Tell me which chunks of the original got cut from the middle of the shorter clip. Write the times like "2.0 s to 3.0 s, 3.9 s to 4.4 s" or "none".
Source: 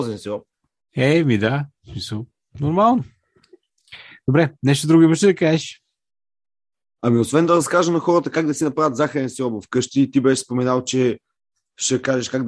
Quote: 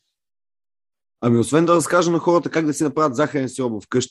none

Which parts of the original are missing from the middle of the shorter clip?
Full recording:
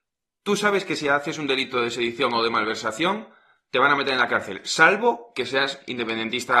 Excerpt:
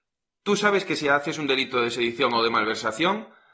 none

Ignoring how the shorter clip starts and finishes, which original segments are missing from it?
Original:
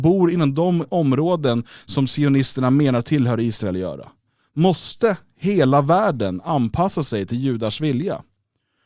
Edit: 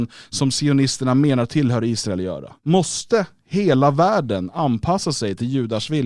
4.1 s to 4.5 s

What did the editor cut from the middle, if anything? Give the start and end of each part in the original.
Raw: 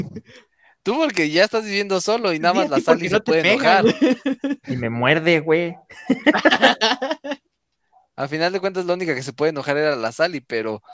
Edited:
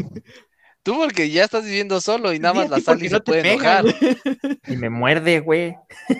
none

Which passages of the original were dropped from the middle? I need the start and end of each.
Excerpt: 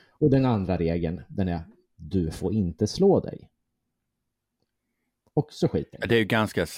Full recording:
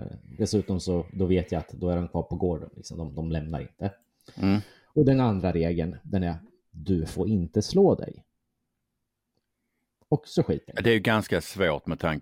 none

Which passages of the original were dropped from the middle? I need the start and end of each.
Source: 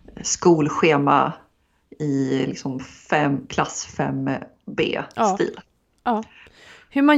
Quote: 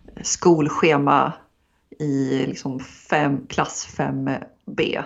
none

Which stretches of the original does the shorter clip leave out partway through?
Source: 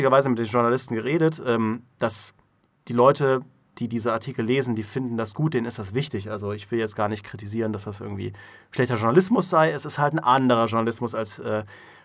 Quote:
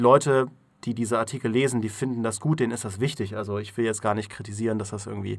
none

